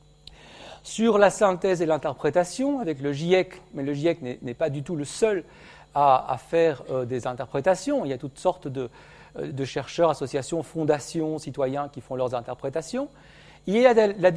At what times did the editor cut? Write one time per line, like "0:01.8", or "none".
none